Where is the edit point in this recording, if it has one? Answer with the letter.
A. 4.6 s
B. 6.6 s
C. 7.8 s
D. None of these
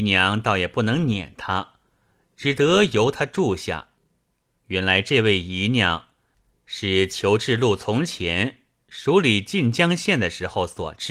A